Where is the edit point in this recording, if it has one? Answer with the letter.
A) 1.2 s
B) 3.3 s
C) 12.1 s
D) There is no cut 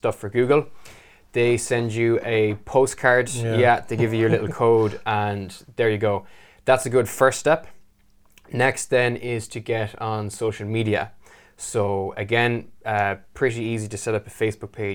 D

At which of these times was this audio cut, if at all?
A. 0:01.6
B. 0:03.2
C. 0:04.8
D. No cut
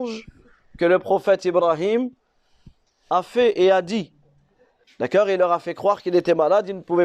C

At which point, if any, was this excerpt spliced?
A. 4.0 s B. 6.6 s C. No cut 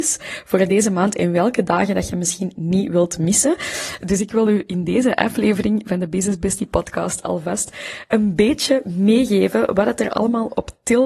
A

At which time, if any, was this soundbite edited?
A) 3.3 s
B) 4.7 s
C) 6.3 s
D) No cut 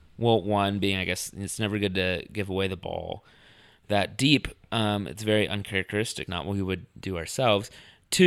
C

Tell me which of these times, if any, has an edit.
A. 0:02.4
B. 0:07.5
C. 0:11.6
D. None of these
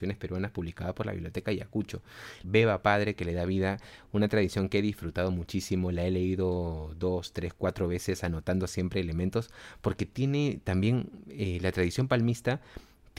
A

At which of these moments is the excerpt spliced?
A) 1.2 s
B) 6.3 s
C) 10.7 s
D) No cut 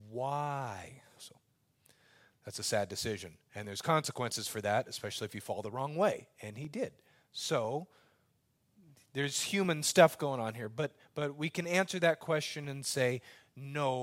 A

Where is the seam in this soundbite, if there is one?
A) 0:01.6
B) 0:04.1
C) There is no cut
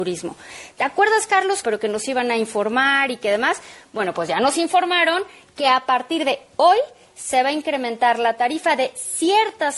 A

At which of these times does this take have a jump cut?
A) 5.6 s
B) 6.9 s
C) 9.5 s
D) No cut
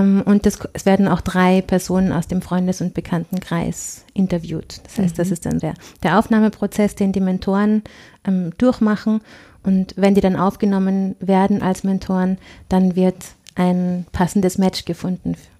A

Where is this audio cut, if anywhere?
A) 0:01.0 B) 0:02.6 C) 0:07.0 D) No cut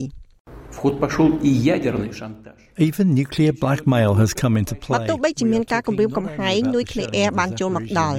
D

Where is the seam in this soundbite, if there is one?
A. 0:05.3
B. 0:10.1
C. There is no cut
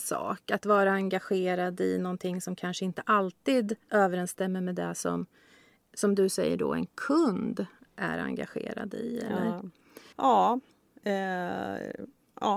B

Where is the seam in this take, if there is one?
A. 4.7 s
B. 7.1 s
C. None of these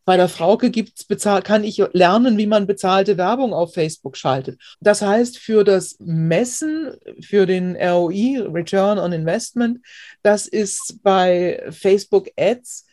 A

